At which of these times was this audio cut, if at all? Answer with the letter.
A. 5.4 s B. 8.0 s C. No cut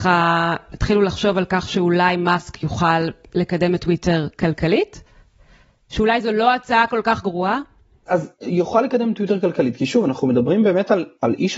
C